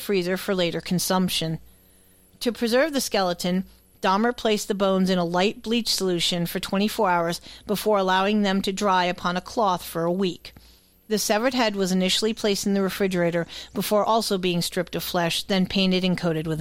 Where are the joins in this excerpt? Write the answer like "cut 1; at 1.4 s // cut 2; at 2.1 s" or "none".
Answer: none